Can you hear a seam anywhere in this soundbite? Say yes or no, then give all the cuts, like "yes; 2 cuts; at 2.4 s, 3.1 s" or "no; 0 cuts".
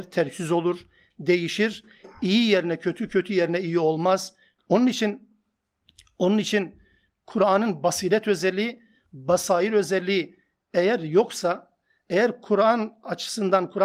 yes; 1 cut; at 4.6 s